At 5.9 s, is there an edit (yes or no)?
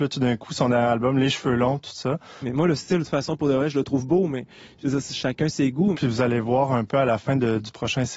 yes